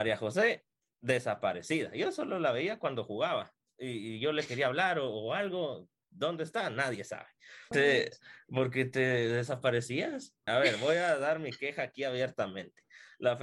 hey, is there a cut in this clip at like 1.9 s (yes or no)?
no